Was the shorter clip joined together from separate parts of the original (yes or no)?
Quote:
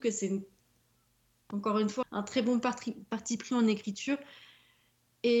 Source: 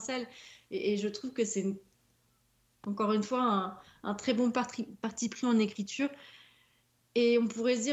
yes